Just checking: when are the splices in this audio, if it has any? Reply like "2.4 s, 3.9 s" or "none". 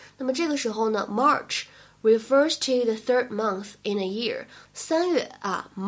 4.6 s